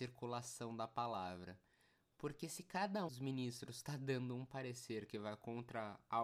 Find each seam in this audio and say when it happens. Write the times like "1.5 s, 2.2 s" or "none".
3.1 s